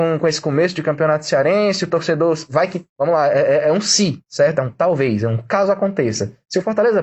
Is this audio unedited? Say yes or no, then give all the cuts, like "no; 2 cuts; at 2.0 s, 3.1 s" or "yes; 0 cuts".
yes; 0 cuts